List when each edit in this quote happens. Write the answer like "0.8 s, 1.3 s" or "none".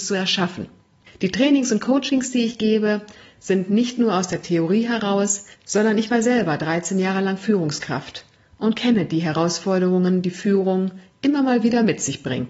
1.1 s, 5.5 s